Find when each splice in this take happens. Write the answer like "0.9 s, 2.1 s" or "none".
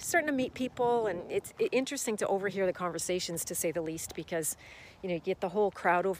none